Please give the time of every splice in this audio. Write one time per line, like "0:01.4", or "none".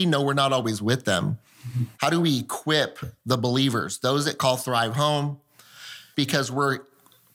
0:02.0
0:06.1

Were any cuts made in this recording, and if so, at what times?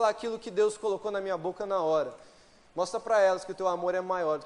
0:02.7

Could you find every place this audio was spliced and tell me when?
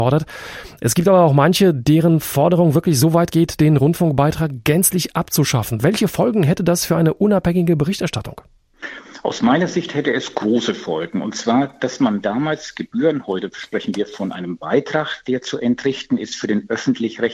none

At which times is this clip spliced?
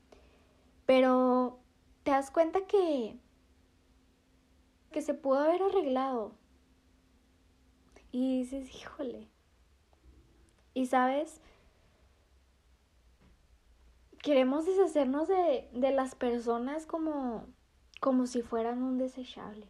0:04.9

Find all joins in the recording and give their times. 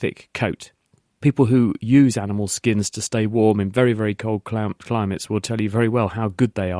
none

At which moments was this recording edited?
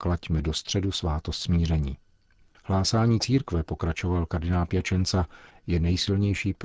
0:05.5

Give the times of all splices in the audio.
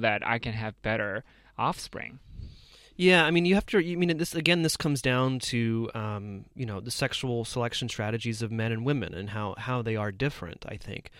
none

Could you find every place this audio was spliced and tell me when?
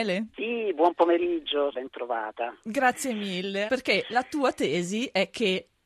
0:01.7
0:03.7

